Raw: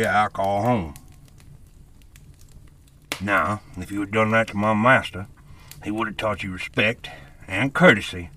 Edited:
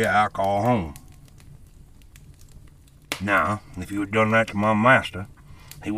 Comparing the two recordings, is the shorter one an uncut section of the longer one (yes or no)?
yes